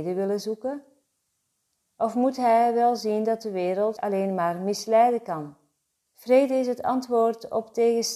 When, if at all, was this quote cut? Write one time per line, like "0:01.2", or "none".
0:04.0
0:06.1